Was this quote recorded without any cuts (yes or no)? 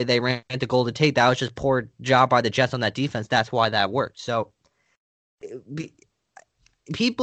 yes